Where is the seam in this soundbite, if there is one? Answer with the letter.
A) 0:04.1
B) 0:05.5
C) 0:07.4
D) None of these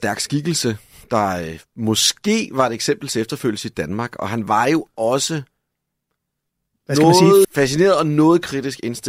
C